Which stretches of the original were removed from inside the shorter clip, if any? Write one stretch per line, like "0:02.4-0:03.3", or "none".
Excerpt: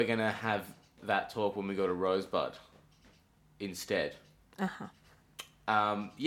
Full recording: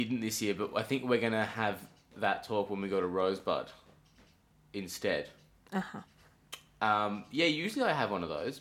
none